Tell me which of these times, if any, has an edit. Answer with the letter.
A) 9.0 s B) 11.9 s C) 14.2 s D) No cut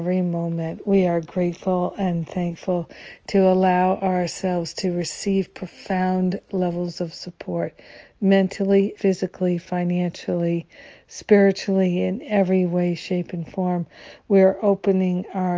A